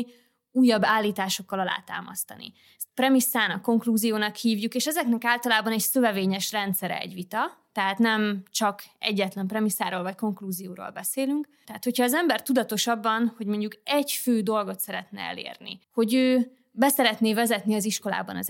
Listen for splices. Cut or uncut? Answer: cut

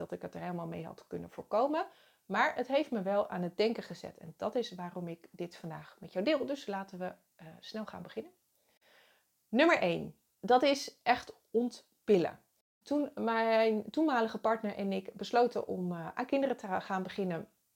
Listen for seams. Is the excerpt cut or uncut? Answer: uncut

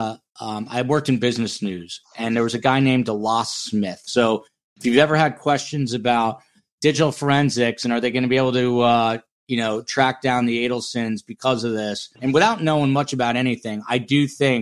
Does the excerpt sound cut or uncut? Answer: cut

